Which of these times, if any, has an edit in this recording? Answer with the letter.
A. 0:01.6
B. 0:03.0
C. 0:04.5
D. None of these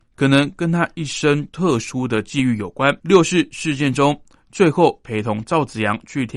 B